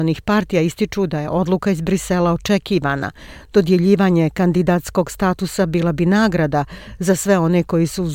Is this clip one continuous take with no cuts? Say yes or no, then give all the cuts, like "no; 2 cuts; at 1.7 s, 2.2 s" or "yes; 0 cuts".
yes; 0 cuts